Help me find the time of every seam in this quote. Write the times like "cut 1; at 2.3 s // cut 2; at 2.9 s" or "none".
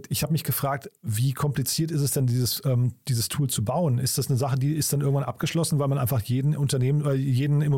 none